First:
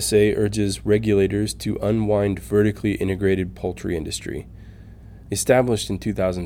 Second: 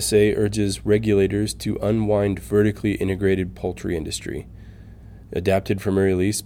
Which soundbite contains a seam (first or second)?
first